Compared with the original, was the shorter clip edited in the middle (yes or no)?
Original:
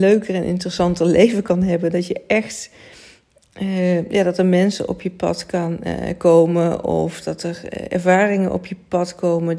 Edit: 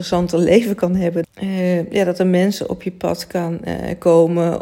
yes